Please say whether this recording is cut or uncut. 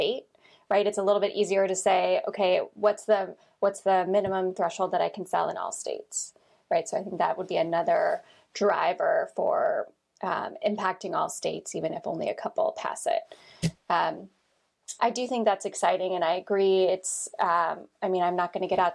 cut